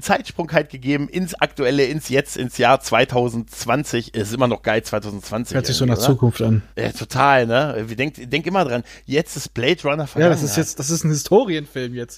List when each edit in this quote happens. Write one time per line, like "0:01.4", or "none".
0:06.7